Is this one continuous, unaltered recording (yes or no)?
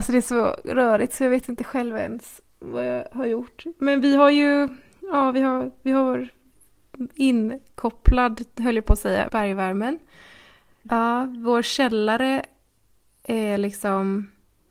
no